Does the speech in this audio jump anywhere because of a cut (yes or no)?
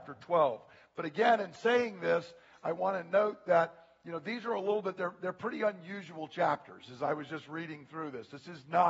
no